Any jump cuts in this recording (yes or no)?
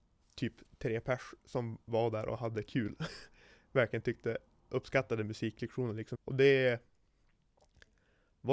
yes